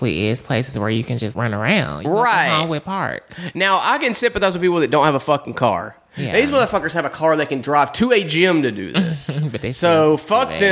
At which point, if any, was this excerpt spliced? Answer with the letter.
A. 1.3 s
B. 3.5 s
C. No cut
A